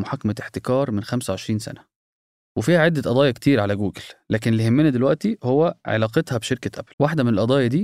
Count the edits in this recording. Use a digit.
1